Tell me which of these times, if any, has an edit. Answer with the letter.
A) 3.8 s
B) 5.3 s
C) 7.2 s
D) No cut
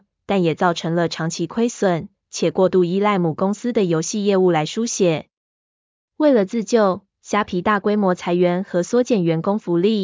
D